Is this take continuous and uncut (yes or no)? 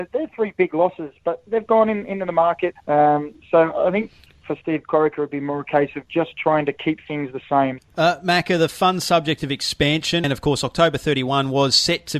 no